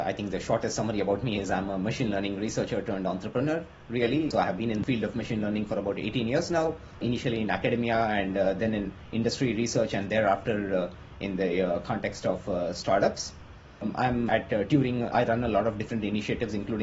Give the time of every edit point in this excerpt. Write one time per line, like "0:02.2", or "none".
none